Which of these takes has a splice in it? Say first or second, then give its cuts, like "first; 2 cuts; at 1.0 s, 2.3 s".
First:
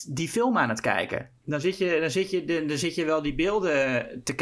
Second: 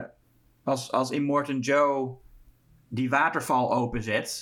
first; 1 cut; at 1.4 s